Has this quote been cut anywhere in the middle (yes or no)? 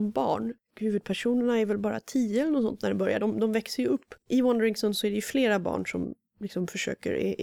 no